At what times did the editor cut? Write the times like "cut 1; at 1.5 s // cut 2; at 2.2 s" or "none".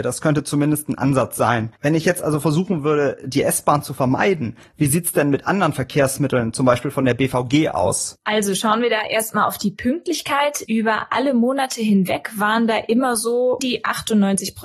cut 1; at 10.6 s // cut 2; at 13.6 s